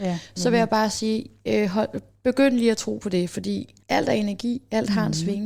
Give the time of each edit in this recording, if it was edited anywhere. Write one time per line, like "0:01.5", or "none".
0:03.8